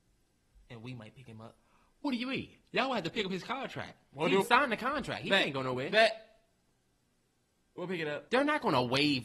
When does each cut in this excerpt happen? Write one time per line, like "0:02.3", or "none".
0:04.4
0:08.3